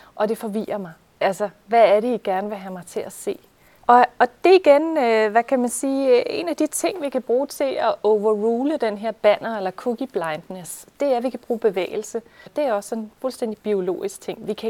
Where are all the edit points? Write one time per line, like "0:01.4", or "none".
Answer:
0:03.8
0:12.5